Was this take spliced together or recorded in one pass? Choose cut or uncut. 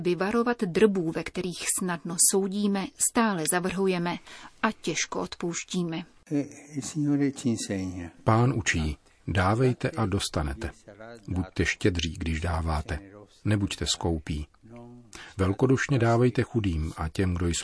uncut